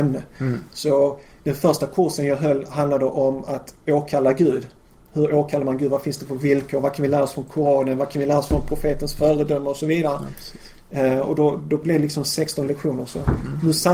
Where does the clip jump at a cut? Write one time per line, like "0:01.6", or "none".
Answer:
none